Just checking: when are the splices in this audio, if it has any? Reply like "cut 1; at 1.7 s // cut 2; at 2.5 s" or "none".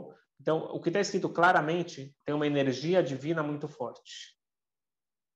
cut 1; at 2.2 s

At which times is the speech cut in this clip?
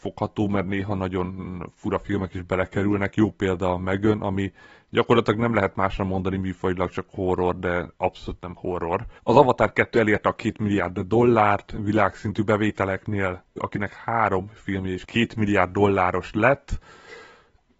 cut 1; at 9.2 s // cut 2; at 13.6 s

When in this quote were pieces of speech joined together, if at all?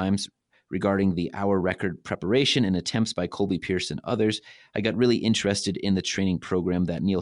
none

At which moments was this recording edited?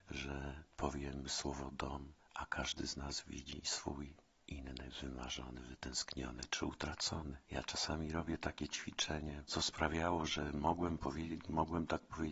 cut 1; at 7.4 s // cut 2; at 9.5 s // cut 3; at 11.4 s

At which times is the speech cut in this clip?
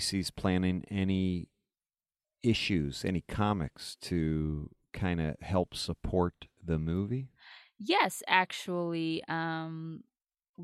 none

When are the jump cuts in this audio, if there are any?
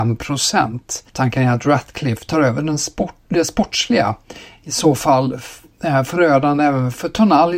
cut 1; at 1.1 s // cut 2; at 4.6 s

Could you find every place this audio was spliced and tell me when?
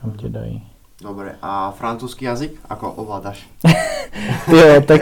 none

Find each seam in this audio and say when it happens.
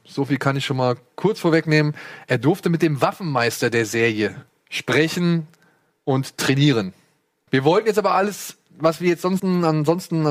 cut 1; at 7.5 s // cut 2; at 9.4 s

